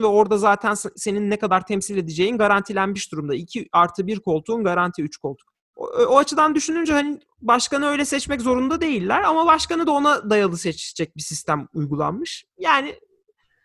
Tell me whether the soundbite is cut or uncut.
cut